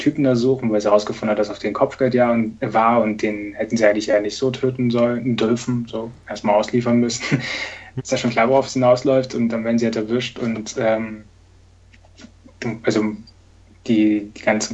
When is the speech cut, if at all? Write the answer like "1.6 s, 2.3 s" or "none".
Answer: 8.0 s, 12.8 s